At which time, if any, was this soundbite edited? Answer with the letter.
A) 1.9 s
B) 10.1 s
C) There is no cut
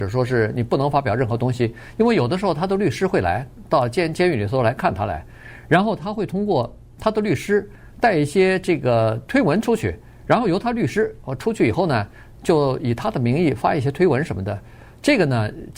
C